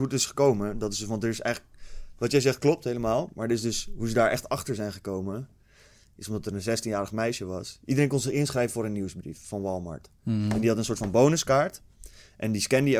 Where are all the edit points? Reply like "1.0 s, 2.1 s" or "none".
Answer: none